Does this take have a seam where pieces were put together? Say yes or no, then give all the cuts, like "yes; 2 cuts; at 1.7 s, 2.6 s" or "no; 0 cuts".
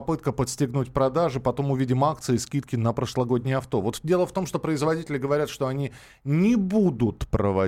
no; 0 cuts